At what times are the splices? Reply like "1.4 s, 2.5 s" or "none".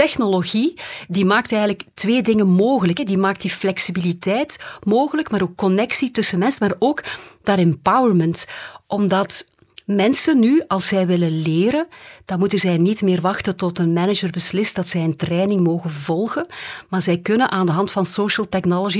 none